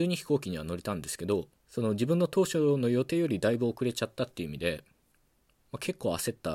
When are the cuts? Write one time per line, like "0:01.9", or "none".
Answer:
0:01.6